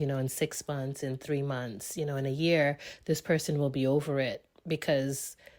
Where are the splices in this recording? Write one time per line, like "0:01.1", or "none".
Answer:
none